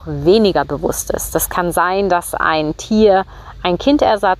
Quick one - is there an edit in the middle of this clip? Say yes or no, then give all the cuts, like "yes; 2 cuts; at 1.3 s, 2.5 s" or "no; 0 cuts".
no; 0 cuts